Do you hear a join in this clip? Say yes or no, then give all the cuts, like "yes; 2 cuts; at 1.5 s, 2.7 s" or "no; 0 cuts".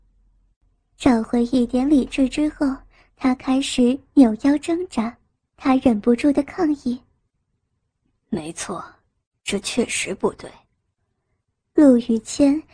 yes; 1 cut; at 5.5 s